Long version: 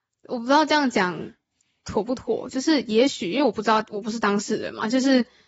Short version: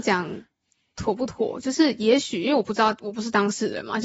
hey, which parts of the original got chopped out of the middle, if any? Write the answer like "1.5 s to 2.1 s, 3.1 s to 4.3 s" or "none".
none